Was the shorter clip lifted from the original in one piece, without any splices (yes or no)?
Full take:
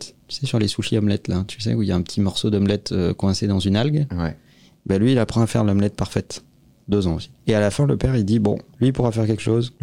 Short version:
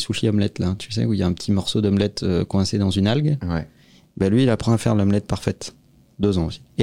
yes